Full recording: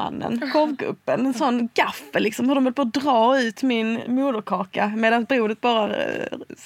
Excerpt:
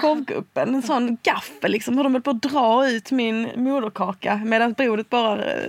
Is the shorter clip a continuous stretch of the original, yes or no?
yes